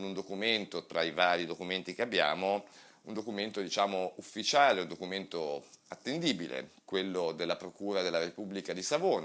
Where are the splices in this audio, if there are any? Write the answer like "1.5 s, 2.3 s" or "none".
none